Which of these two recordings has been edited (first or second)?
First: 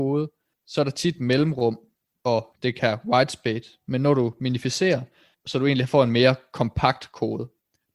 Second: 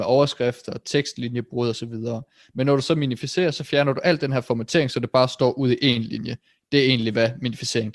first